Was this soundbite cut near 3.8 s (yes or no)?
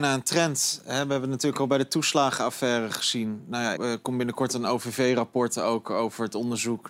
yes